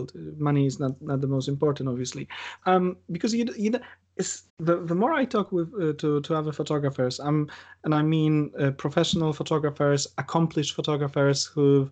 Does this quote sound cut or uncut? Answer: cut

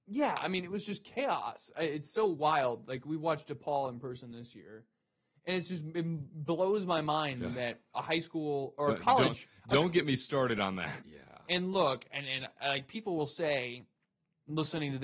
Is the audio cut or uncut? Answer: cut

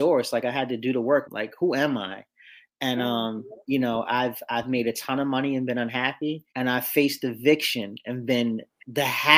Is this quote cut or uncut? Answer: cut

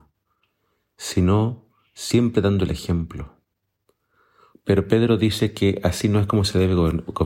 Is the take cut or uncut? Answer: cut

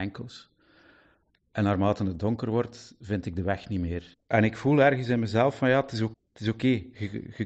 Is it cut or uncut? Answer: cut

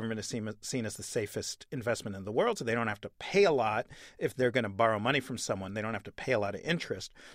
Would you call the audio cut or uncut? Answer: uncut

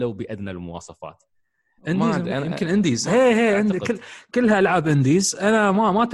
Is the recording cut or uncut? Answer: cut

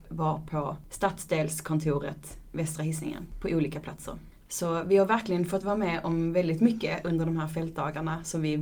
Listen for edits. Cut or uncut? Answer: uncut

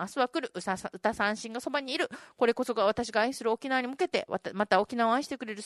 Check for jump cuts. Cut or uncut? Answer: uncut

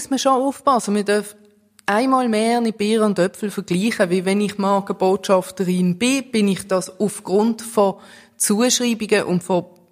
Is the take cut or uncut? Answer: uncut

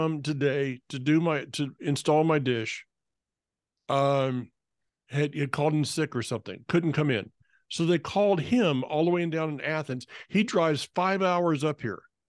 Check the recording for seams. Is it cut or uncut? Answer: uncut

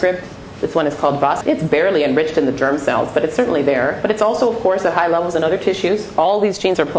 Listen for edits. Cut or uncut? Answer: cut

